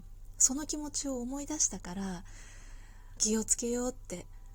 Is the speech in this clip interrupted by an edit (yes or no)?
yes